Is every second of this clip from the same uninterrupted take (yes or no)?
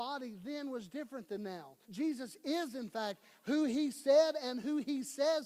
no